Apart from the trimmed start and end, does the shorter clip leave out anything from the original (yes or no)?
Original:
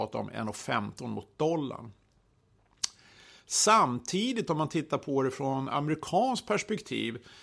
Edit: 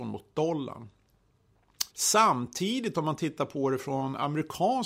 yes